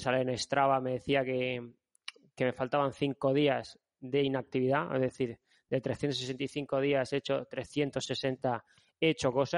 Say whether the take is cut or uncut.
uncut